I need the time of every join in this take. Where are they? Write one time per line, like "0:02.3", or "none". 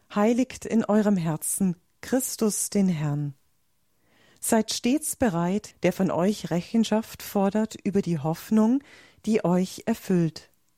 0:05.7